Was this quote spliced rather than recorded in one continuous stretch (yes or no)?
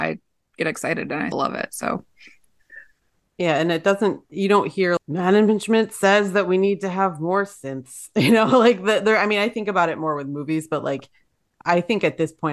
yes